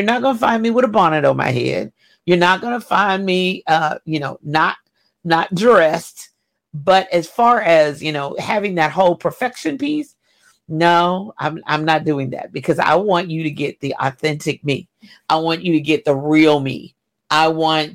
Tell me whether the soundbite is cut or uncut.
uncut